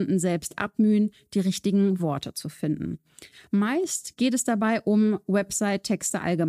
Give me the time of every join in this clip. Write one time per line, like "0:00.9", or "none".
none